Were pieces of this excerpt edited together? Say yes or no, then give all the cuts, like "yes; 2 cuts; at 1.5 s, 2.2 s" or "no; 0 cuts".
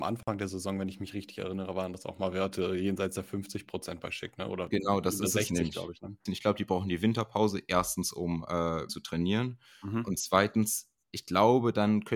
yes; 2 cuts; at 6.3 s, 8.9 s